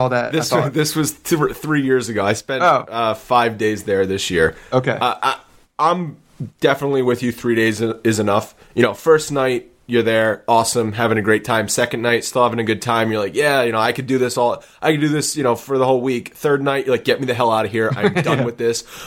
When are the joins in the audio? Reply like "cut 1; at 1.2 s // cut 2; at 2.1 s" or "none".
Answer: none

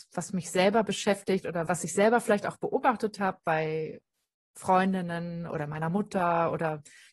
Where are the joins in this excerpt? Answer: cut 1; at 1.7 s

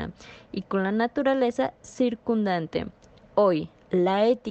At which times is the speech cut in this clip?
none

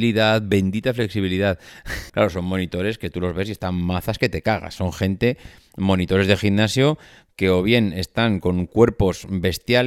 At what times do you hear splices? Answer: cut 1; at 2.1 s

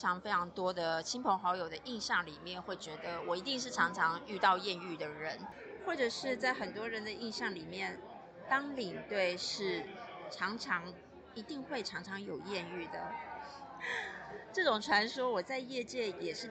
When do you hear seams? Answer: none

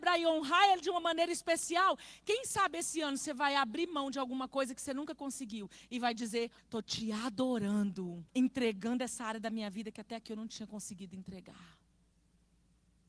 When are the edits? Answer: cut 1; at 6.6 s // cut 2; at 8.3 s

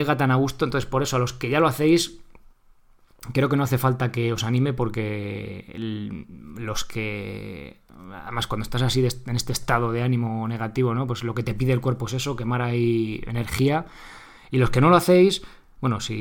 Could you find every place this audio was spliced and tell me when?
none

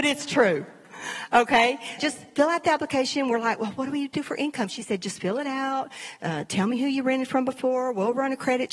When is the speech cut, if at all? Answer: cut 1; at 2.0 s

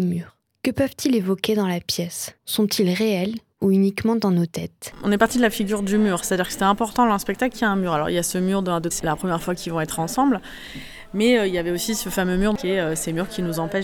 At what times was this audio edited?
cut 1; at 8.9 s

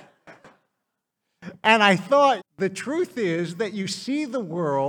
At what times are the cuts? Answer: cut 1; at 2.4 s

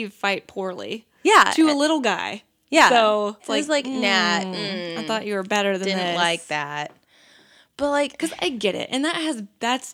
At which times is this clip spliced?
cut 1; at 3.4 s

